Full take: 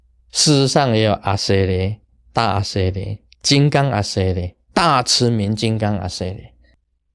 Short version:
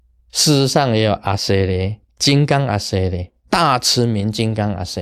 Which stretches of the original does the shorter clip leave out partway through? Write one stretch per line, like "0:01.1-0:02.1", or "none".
0:02.1-0:03.3